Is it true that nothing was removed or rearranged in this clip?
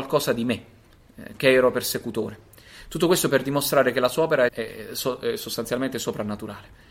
no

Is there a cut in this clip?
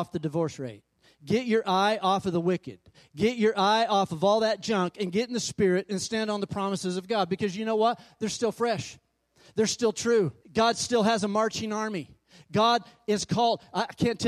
yes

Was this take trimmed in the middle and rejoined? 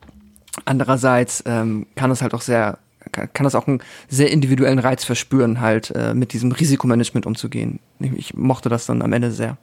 no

